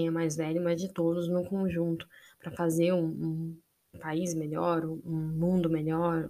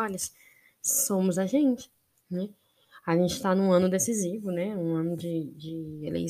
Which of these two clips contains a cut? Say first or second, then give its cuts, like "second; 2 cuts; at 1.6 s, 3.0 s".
first; 1 cut; at 3.9 s